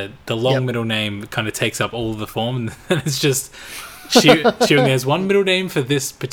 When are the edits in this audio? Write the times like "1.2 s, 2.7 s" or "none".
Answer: none